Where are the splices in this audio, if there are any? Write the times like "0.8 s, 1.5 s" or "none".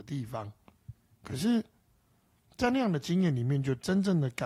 none